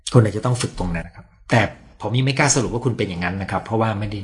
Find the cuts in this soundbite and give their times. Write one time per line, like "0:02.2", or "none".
0:01.0